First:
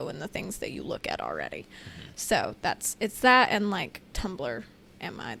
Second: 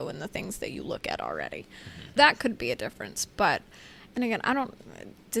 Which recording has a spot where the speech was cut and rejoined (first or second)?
second